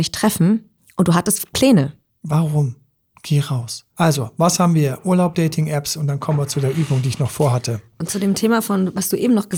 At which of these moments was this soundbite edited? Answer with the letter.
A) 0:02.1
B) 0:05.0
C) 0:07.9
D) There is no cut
A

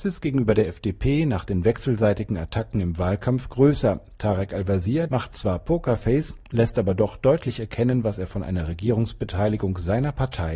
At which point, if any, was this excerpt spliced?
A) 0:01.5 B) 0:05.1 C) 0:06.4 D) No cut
B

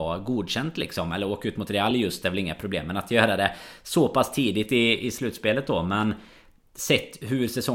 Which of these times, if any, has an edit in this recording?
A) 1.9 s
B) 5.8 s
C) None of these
C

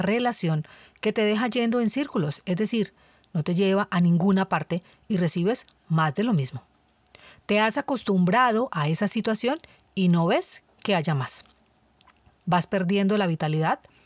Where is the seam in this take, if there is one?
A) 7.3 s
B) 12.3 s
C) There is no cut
B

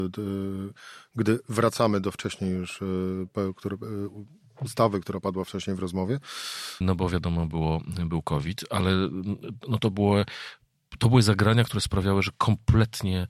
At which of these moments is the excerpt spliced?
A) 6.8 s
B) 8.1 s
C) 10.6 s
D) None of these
A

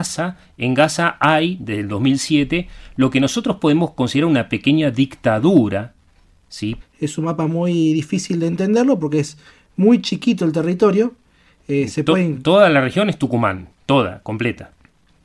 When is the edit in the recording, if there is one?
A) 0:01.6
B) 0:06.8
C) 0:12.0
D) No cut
B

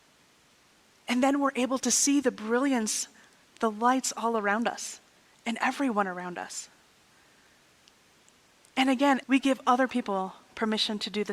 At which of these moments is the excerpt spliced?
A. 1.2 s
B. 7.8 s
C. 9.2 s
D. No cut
C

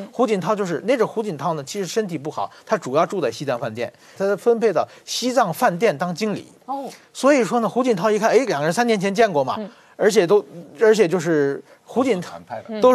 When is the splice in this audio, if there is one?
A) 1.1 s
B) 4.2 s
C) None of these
B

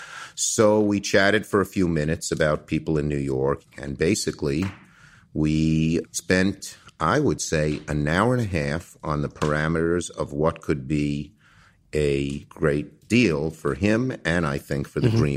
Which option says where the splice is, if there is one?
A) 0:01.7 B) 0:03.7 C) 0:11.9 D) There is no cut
B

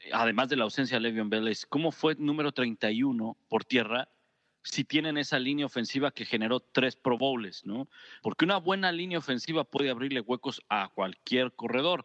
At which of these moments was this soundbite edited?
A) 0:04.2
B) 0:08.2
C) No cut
B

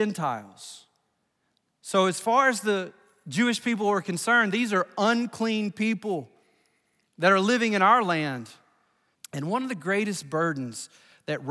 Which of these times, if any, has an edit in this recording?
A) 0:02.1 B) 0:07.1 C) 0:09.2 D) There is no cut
C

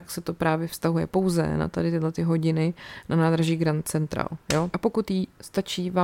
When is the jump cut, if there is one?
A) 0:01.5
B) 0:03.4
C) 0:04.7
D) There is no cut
C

